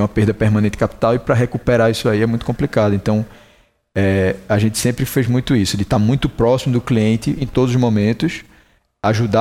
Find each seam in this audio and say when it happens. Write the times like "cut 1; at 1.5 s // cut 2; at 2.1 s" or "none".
none